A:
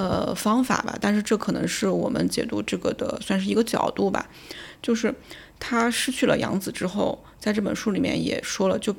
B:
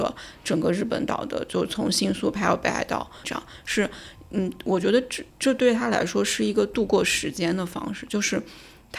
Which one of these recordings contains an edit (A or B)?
B